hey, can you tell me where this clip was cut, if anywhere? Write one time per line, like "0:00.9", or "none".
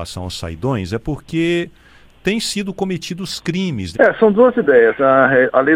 0:03.9